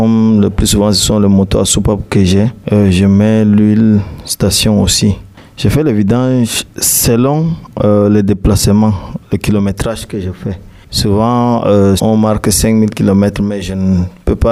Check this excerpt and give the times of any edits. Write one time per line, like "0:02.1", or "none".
0:12.0